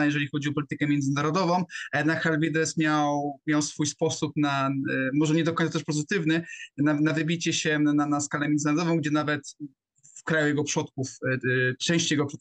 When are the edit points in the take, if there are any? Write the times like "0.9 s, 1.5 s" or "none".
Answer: none

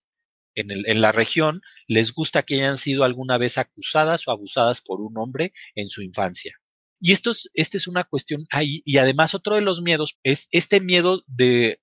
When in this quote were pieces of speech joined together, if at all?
7.0 s, 10.1 s

